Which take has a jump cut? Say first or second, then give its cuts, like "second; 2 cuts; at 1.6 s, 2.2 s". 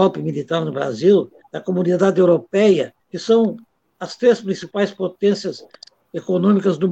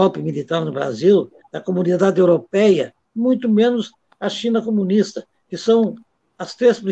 first; 1 cut; at 3.0 s